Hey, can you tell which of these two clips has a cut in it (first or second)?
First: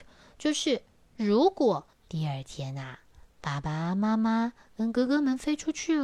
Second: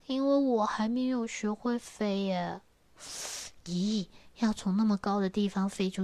first